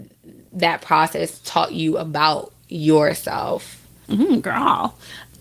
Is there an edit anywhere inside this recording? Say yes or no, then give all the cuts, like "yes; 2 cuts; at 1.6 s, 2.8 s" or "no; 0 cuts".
yes; 1 cut; at 4.1 s